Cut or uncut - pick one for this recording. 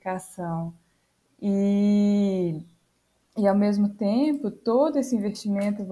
uncut